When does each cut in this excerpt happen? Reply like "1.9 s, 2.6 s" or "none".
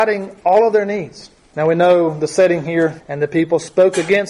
1.5 s, 3.0 s